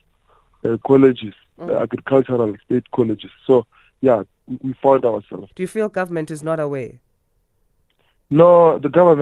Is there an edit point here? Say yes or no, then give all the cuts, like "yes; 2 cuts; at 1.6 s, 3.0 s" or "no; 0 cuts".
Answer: yes; 2 cuts; at 4.3 s, 5.5 s